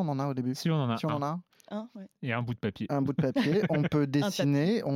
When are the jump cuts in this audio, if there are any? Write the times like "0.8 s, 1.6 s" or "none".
none